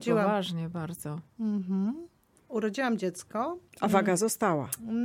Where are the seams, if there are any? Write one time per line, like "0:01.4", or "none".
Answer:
0:03.7